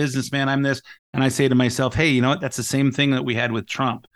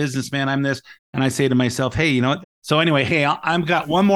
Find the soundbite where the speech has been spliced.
second; 1 cut; at 2.4 s

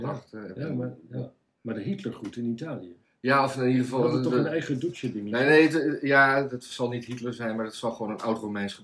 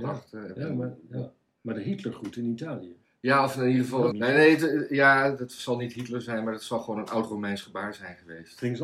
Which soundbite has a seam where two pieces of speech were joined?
second; 1 cut; at 4.1 s

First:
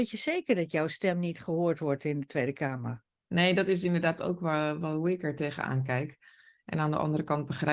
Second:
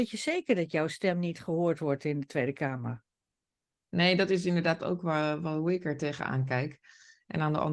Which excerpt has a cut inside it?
first; 1 cut; at 3.1 s

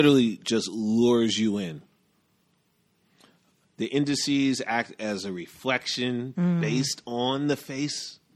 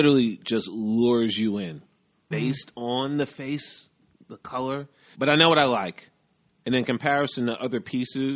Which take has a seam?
second; 2 cuts; at 2.3 s, 5.1 s

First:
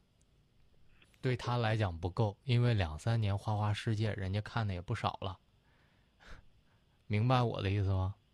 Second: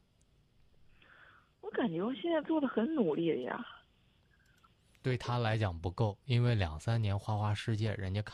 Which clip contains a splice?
first; 1 cut; at 1.0 s

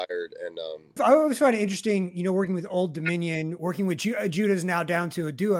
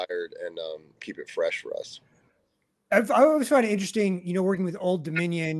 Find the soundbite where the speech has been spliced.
first; 1 cut; at 1.0 s

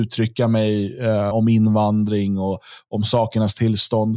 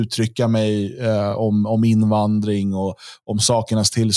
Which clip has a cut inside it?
first; 1 cut; at 1.3 s

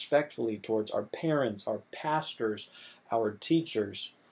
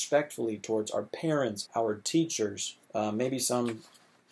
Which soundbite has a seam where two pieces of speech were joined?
second; 2 cuts; at 1.6 s, 2.8 s

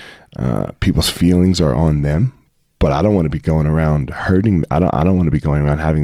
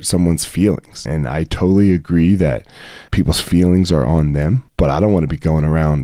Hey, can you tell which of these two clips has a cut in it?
second; 3 cuts; at 1.1 s, 3.1 s, 4.7 s

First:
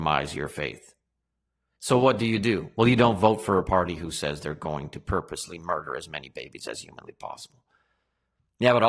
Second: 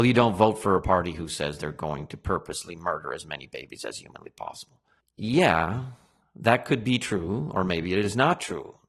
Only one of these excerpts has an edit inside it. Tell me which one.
second; 1 cut; at 5.0 s

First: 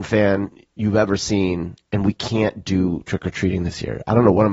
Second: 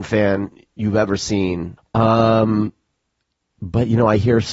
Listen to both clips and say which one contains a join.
second; 1 cut; at 1.8 s

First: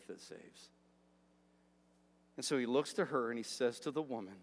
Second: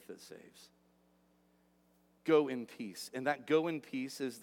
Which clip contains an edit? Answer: second; 1 cut; at 2.2 s

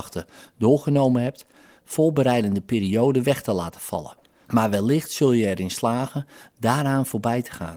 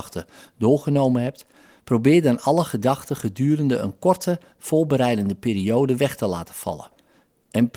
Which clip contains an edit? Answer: first; 2 cuts; at 1.8 s, 4.5 s

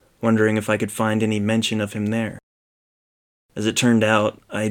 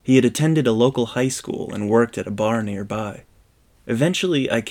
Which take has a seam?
second; 1 cut; at 3.7 s

